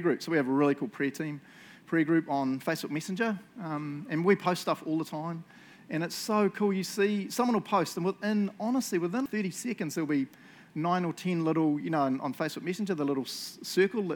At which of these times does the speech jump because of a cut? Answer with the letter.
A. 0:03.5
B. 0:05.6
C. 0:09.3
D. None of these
C